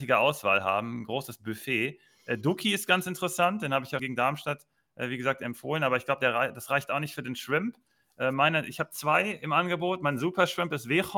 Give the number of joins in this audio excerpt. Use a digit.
1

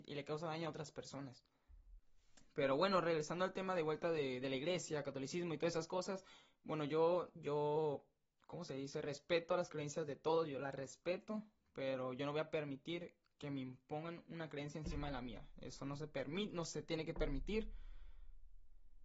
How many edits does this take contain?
0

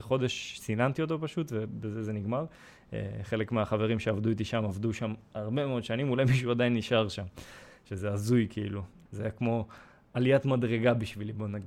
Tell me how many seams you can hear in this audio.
1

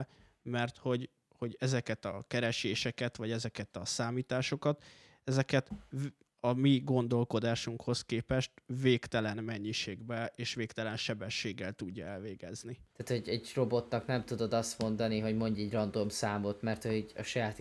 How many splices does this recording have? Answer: 1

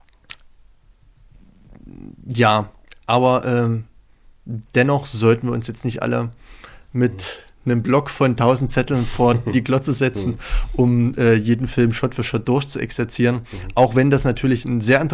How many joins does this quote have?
0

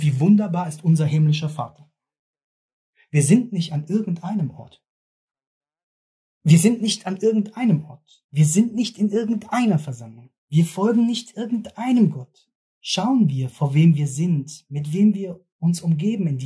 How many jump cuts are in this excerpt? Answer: 1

